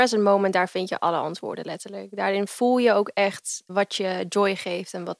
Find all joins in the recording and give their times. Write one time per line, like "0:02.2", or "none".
0:03.7